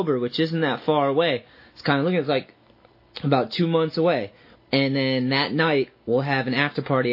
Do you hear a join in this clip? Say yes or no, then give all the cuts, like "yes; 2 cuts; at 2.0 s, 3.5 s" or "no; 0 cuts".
yes; 1 cut; at 4.5 s